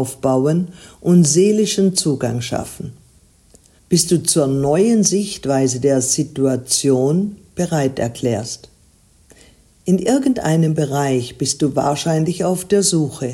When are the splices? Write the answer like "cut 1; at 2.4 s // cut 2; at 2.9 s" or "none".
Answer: cut 1; at 3.8 s